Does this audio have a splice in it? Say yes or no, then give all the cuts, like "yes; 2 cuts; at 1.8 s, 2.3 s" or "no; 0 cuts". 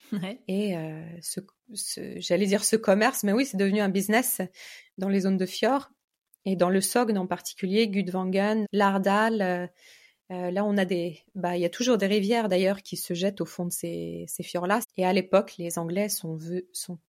yes; 3 cuts; at 8.6 s, 12.8 s, 14.8 s